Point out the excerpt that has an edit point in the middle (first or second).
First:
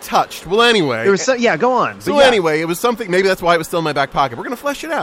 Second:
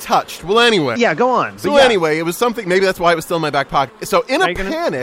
second